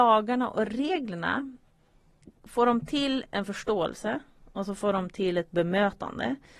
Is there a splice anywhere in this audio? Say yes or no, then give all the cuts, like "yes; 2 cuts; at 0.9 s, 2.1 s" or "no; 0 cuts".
no; 0 cuts